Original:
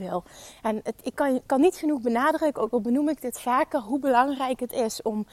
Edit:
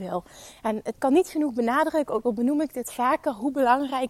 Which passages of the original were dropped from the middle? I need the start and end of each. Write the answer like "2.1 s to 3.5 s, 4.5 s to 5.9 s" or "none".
0.9 s to 1.4 s

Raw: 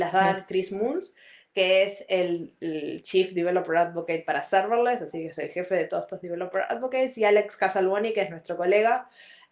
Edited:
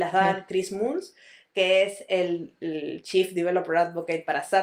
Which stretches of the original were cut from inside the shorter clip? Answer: none

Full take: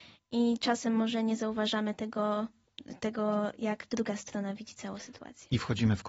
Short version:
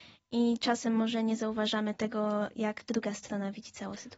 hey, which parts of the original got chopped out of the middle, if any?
2.0 s to 3.0 s

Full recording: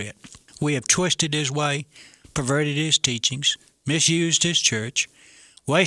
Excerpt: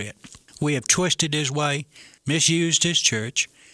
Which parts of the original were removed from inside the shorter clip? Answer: 2.2 s to 3.8 s

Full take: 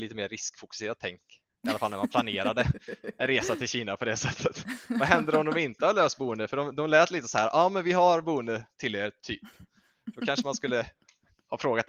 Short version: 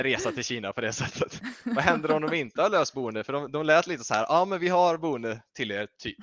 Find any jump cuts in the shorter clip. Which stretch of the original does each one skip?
none

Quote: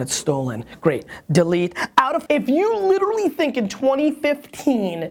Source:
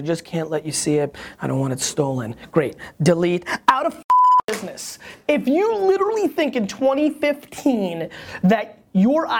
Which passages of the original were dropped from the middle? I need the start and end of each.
4.0 s to 5.2 s

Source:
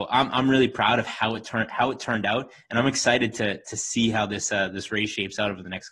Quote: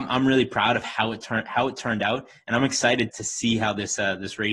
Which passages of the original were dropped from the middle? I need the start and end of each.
3.3 s to 3.6 s

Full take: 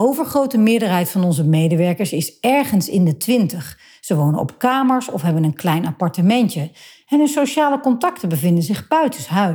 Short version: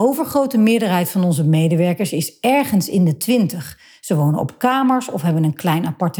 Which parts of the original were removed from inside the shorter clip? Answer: none

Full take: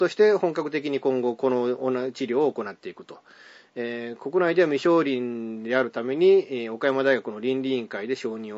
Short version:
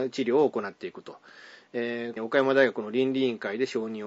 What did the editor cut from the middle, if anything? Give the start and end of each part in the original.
4.2 s to 6.7 s

